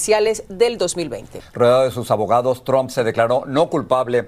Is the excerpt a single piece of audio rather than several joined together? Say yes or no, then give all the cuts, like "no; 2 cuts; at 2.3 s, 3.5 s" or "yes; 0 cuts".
no; 1 cut; at 1.4 s